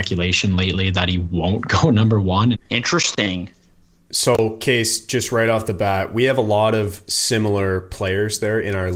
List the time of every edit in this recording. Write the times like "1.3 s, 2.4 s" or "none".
2.5 s